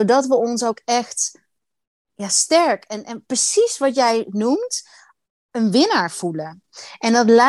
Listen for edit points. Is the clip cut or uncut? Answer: uncut